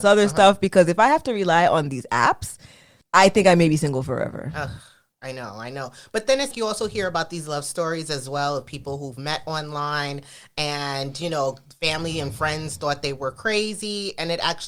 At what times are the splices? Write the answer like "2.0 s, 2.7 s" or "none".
6.5 s